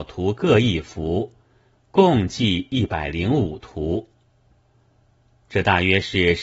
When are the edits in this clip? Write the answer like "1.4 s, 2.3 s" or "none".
none